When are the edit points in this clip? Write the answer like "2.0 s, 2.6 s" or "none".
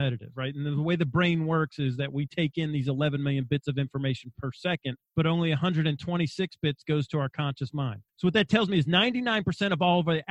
5.1 s, 8.1 s